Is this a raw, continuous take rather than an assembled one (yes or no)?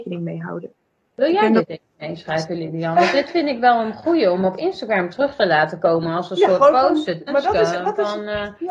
no